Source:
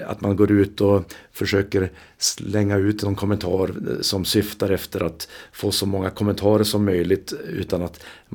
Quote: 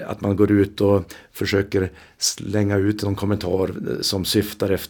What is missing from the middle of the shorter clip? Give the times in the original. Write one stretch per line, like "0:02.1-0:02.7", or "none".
none